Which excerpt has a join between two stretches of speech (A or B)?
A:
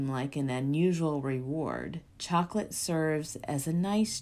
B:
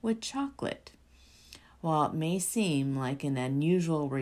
A